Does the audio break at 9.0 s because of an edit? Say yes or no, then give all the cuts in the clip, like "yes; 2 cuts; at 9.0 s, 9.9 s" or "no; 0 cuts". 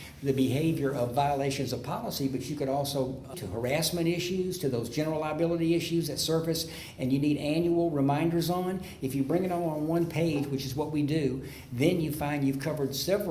no; 1 cut; at 3.3 s